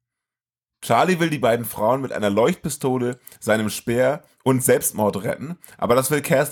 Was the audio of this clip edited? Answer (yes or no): no